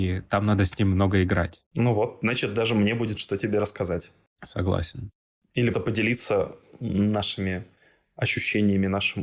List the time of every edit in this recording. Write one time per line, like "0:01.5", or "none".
0:05.7